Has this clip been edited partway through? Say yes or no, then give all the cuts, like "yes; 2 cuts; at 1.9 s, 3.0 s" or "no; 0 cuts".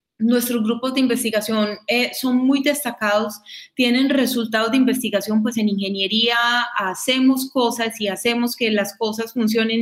no; 0 cuts